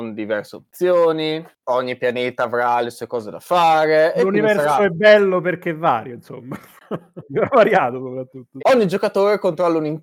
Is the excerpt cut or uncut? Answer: cut